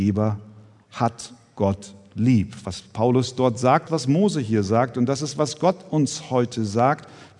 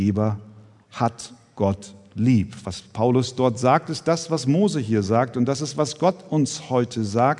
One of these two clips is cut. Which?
first; 1 cut; at 3.9 s

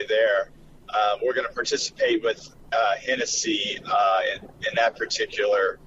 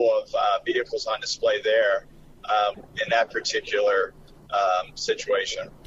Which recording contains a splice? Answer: second; 1 cut; at 2.7 s

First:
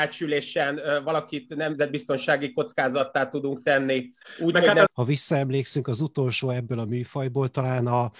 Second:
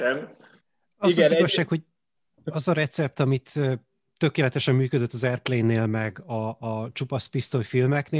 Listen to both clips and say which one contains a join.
first; 1 cut; at 4.9 s

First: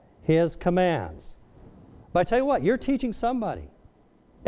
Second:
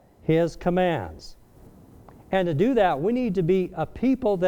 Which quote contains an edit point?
first; 1 cut; at 2.0 s

